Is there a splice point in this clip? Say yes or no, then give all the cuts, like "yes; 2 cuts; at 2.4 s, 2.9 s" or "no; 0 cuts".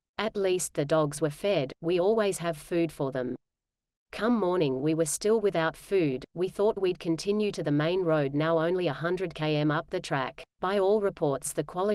yes; 1 cut; at 10.5 s